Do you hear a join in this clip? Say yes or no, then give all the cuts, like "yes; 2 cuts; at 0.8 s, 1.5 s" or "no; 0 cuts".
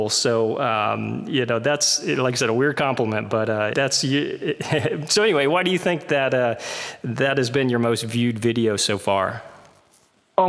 yes; 1 cut; at 3.7 s